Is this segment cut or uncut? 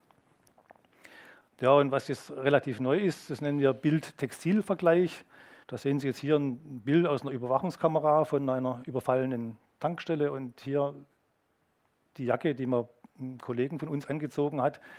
cut